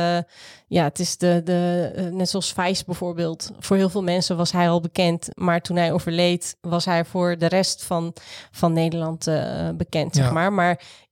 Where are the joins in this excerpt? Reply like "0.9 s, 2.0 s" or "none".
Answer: none